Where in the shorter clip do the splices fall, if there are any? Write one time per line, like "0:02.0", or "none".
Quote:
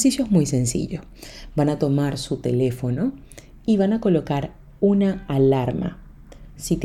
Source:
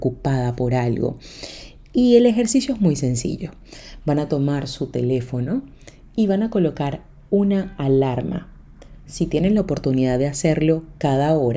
none